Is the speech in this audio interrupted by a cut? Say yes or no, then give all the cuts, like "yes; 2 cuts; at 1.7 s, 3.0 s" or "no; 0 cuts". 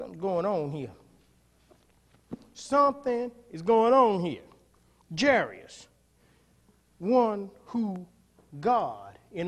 no; 0 cuts